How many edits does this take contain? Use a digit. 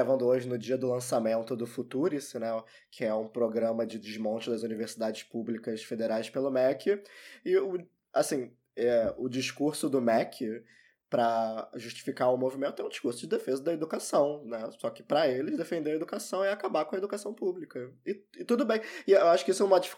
0